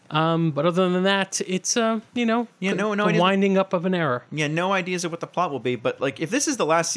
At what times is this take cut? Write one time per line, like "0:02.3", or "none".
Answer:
none

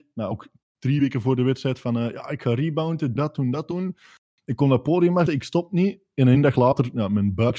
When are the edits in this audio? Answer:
0:03.2
0:05.3

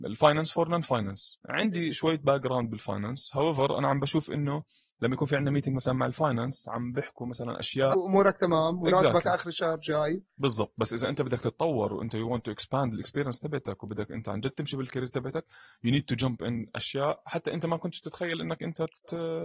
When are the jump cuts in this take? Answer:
0:07.9

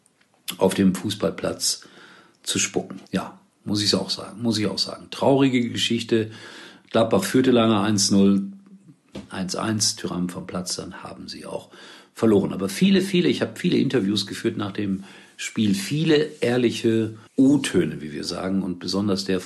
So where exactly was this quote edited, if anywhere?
0:03.1
0:17.3

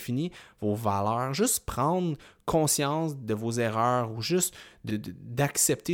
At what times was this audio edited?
0:04.9

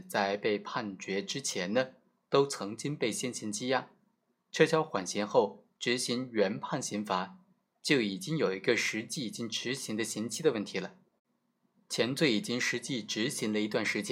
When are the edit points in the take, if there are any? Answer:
none

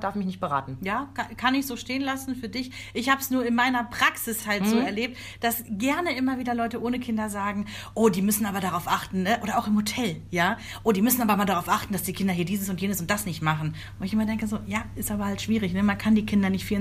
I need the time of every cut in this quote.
none

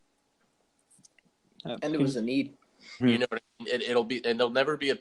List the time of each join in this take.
0:03.0

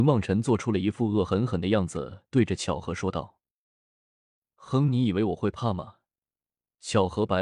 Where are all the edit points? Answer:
none

